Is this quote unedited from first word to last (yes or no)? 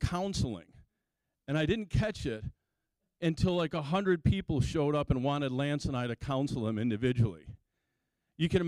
yes